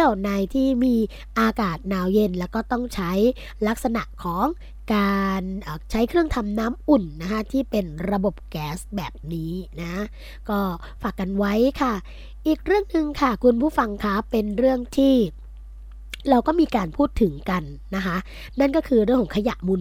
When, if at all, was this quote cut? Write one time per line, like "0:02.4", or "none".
none